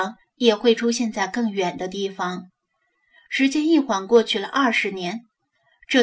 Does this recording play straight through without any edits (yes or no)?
yes